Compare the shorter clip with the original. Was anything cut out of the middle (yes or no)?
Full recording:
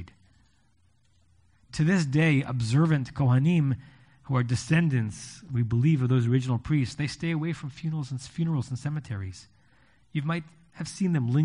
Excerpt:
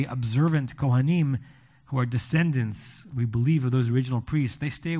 no